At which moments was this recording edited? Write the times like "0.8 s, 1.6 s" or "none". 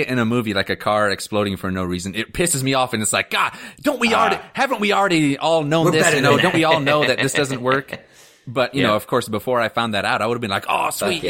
none